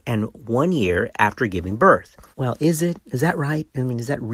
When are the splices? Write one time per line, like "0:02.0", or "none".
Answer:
0:02.3